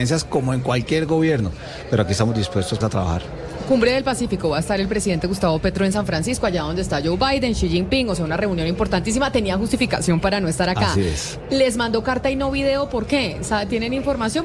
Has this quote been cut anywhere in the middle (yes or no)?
yes